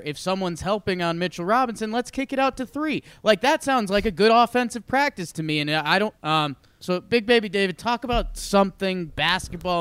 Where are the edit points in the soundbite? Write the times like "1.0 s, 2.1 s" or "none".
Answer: 6.2 s